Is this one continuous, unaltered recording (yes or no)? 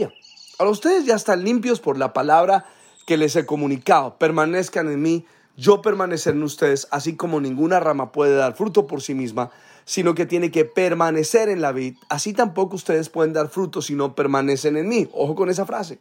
yes